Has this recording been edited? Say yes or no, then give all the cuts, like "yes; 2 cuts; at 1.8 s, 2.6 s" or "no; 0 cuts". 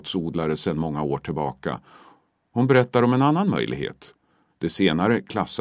yes; 1 cut; at 4.5 s